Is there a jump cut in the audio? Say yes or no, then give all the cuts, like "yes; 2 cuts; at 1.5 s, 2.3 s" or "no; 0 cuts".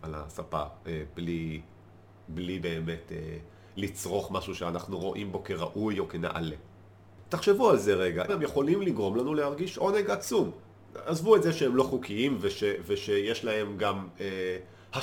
yes; 1 cut; at 8.3 s